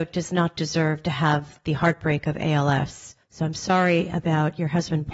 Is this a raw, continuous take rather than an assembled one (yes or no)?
no